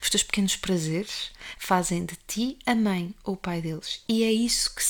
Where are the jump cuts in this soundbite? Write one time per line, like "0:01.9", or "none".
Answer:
0:01.5